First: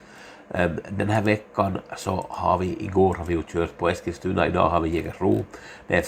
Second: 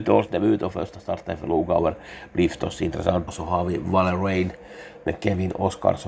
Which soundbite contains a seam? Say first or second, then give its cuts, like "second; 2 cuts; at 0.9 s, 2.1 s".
second; 1 cut; at 3.3 s